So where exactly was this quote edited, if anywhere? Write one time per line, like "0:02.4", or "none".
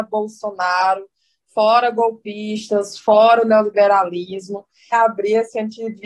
0:04.9